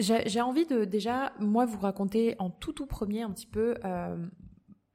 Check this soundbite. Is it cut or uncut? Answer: uncut